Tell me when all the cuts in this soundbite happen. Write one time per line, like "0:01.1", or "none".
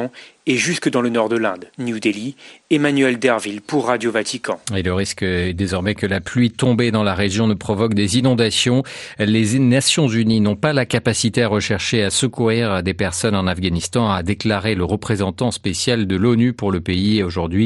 0:01.7